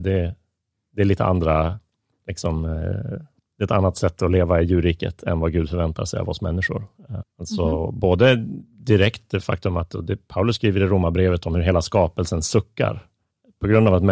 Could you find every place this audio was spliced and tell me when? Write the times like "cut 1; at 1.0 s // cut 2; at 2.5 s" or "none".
cut 1; at 7.3 s